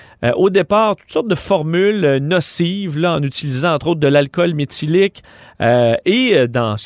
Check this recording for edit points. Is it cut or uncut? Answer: uncut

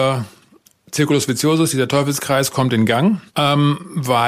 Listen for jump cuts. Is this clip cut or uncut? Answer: cut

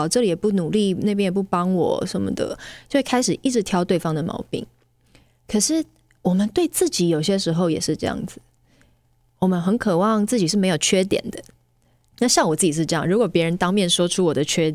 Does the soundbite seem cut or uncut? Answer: cut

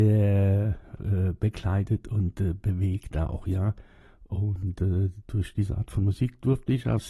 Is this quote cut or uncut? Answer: cut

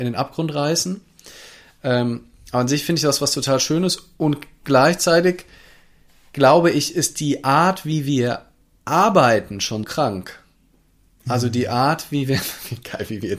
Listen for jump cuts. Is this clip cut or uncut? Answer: cut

